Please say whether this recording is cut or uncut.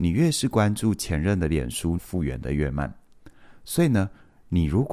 cut